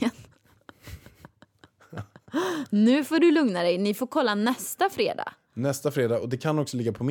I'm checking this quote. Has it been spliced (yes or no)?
no